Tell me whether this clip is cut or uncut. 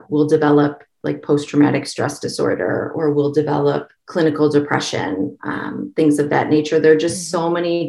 cut